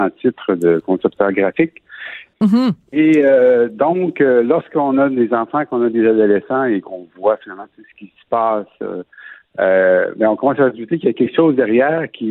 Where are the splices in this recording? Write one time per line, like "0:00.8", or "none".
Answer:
0:02.3